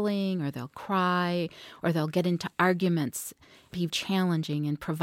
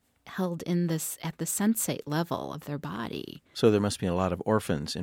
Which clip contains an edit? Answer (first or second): first